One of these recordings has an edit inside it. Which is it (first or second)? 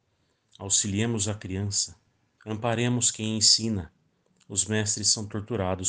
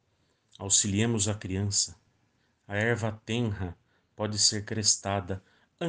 first